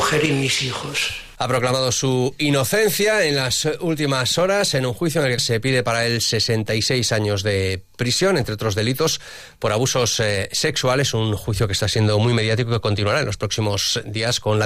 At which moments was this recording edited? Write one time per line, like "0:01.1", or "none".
0:05.4